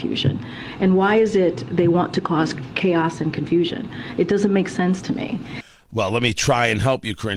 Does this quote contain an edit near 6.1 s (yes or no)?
no